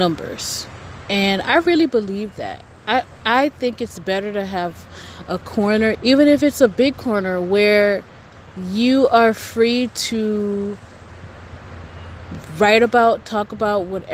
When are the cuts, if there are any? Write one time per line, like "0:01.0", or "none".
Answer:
0:03.2
0:05.9